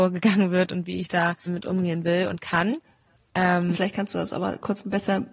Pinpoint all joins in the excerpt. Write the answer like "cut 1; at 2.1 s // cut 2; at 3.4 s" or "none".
cut 1; at 1.5 s // cut 2; at 3.7 s